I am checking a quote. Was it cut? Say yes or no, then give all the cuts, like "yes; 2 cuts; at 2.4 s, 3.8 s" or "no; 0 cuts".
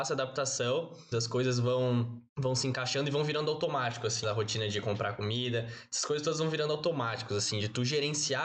yes; 3 cuts; at 1.1 s, 2.3 s, 4.2 s